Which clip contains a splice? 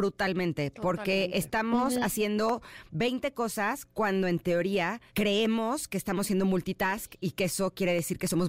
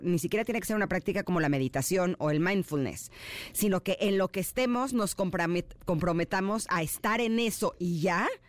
first; 1 cut; at 5.1 s

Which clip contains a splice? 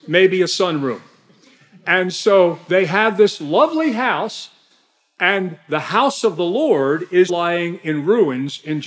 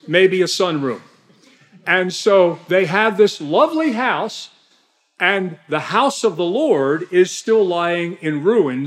first; 1 cut; at 7.3 s

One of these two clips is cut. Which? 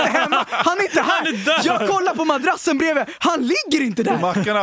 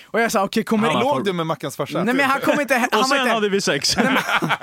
second; 2 cuts; at 0.9 s, 2.0 s

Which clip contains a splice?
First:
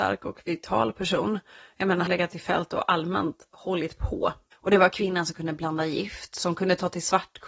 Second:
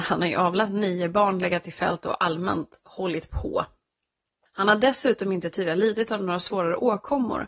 first; 2 cuts; at 2.1 s, 4.5 s

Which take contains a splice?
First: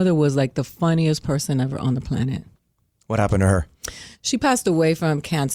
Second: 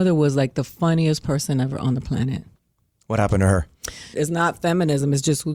second; 1 cut; at 4.1 s

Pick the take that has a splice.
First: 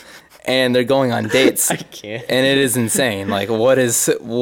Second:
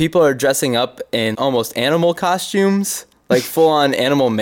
second; 1 cut; at 1.3 s

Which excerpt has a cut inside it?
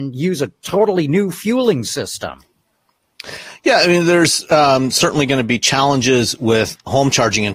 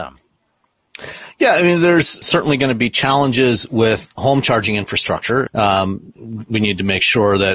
second; 2 cuts; at 2.2 s, 5.5 s

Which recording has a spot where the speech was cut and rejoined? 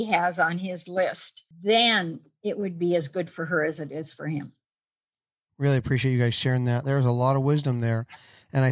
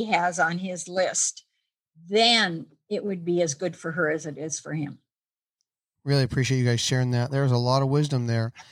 first; 1 cut; at 1.5 s

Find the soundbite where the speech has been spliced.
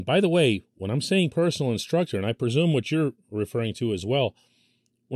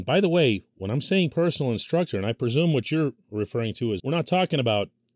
second; 1 cut; at 4.0 s

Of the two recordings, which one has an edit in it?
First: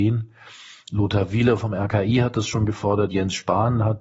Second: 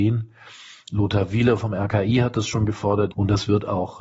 second; 1 cut; at 3.1 s

